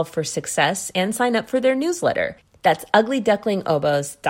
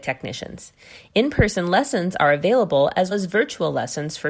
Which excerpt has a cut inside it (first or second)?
second